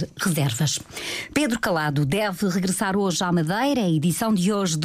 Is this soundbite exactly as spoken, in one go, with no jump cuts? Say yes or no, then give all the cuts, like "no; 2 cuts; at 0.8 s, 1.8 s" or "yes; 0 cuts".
yes; 0 cuts